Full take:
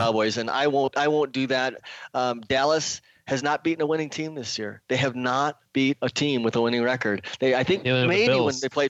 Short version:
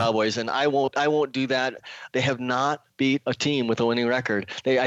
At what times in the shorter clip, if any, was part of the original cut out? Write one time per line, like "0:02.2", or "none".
0:02.1